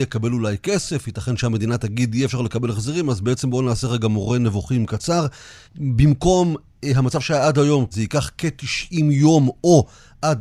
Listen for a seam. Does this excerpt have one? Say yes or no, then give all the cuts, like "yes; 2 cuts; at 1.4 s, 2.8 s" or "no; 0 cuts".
yes; 2 cuts; at 5.6 s, 7.9 s